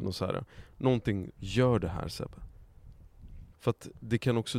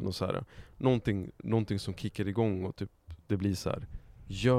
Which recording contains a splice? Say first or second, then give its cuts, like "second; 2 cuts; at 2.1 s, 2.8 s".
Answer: first; 2 cuts; at 1.4 s, 3.5 s